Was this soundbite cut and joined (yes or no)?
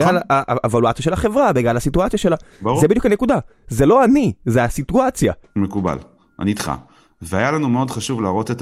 yes